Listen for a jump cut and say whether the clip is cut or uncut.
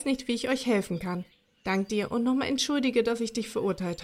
cut